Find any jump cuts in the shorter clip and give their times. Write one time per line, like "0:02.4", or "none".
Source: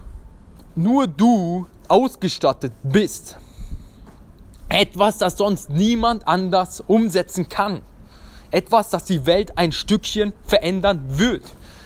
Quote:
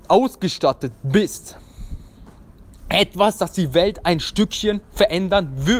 0:03.4